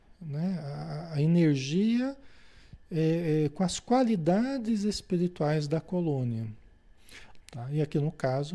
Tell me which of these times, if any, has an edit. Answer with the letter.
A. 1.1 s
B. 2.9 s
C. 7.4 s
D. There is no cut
C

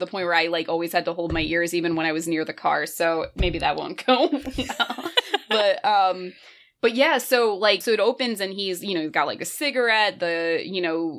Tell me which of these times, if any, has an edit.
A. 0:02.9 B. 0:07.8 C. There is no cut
B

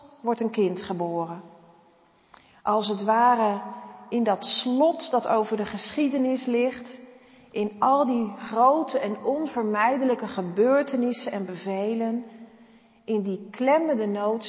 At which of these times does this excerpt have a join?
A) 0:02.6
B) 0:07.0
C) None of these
C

